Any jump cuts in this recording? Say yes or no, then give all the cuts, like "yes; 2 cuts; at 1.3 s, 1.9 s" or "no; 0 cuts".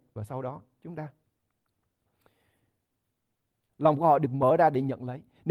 yes; 1 cut; at 3.7 s